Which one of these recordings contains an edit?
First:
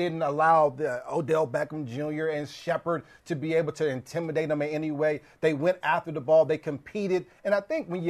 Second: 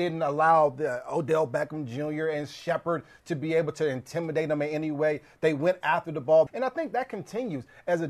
second; 1 cut; at 6.5 s

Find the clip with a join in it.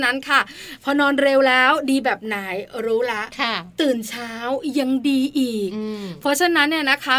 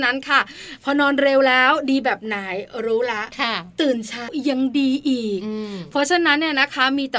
second; 1 cut; at 4.3 s

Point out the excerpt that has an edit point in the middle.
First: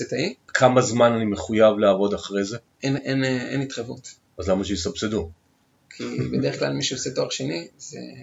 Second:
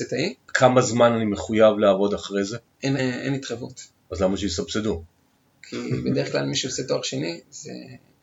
second; 1 cut; at 3.0 s

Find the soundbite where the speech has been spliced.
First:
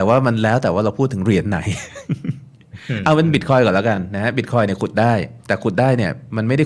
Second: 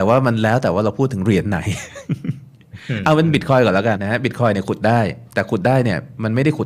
second; 1 cut; at 4.0 s

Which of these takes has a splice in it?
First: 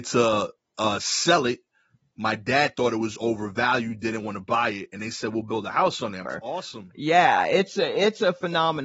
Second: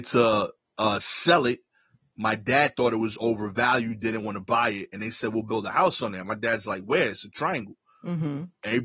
first; 1 cut; at 6.2 s

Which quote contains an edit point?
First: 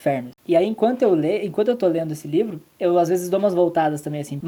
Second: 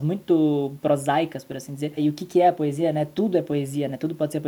second; 1 cut; at 2.0 s

